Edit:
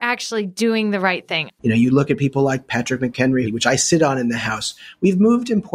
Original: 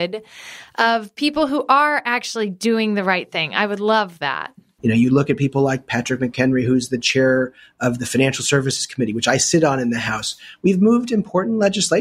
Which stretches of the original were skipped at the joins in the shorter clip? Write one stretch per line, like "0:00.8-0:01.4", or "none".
0:03.5-0:04.7
0:06.6-0:09.1